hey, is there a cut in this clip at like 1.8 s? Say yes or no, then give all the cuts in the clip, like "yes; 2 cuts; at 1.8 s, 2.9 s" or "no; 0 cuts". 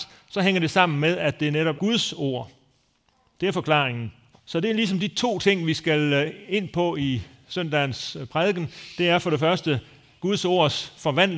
yes; 2 cuts; at 1.8 s, 4.3 s